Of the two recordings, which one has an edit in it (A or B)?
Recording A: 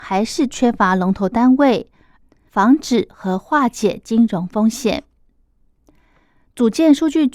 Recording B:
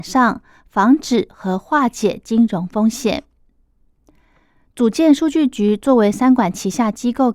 A